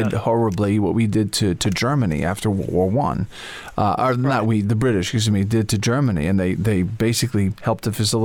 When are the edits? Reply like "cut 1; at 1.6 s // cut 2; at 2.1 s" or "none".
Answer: none